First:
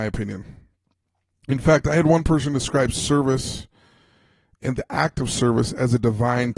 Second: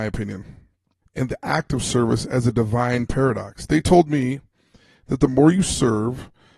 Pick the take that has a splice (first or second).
second